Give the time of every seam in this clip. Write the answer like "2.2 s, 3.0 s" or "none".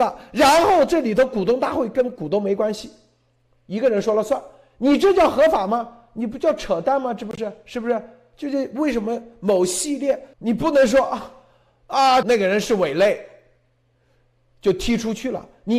10.3 s, 12.2 s